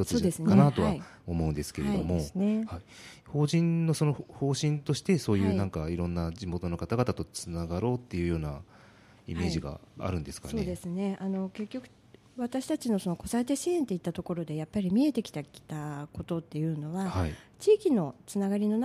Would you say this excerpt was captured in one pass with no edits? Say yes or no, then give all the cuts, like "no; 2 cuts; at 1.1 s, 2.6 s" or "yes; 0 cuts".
yes; 0 cuts